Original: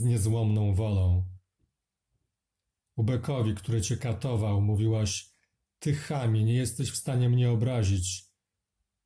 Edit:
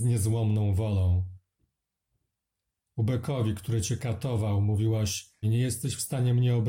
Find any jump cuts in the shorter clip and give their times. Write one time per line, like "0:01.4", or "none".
0:05.4